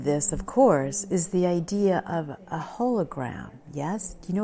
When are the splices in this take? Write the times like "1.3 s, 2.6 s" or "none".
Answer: none

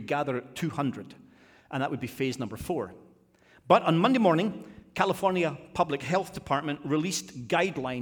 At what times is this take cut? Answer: none

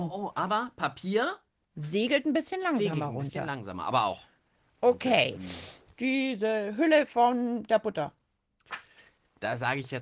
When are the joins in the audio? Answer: 5.9 s

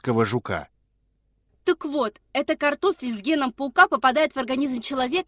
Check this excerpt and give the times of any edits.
none

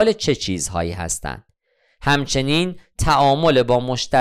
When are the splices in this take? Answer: none

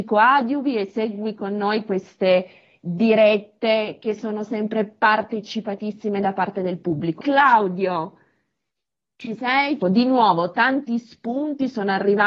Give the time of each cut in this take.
7.2 s, 9.8 s

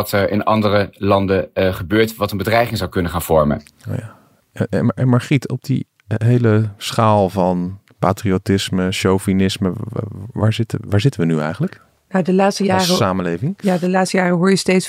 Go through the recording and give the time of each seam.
none

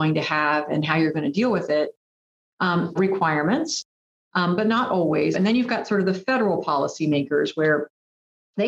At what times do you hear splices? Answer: 3.0 s, 5.3 s

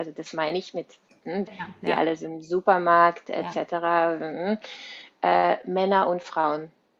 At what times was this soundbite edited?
1.5 s

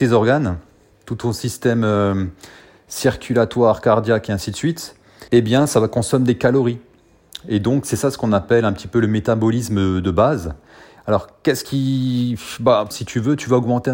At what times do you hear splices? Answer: 5.3 s, 11.0 s, 12.9 s

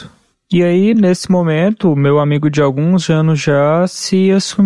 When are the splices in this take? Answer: none

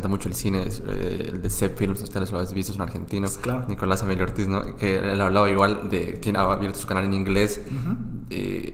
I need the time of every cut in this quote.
none

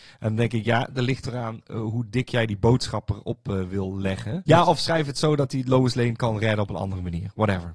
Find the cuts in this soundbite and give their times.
4.5 s

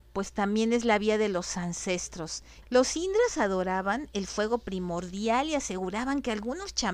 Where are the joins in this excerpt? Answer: 2.6 s

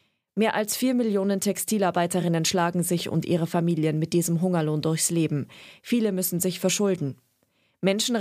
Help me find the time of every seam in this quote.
none

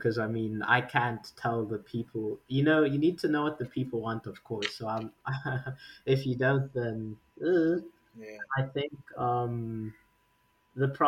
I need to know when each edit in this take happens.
none

